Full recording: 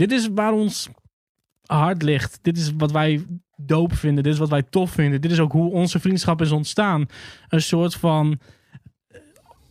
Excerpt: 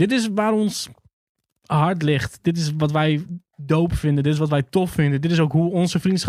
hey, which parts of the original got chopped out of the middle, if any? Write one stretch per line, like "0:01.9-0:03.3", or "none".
none

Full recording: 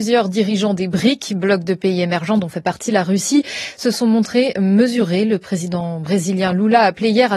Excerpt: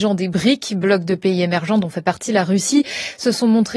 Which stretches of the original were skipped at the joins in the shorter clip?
none

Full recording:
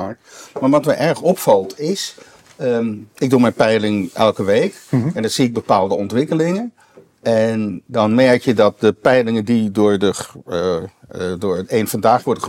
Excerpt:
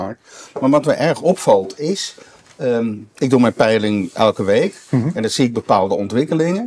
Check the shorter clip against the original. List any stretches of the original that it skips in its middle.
none

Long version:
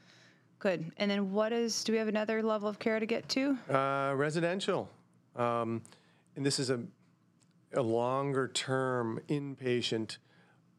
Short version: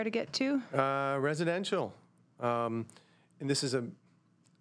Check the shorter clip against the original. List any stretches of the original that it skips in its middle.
none

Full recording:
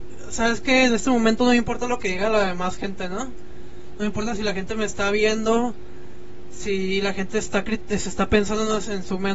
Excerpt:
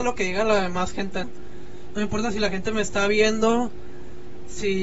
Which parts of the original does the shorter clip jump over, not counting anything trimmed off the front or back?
0:03.1-0:03.3

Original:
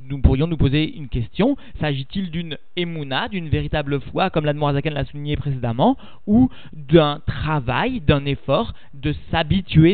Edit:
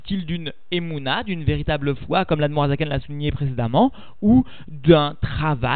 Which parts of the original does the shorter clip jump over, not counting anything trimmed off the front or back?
none

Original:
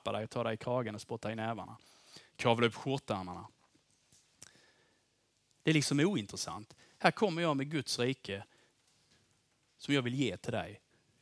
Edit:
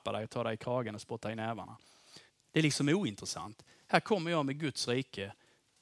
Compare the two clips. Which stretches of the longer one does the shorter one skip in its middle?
0:02.3-0:05.4

